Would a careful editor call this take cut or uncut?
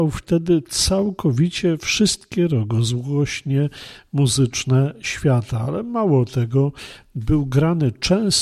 uncut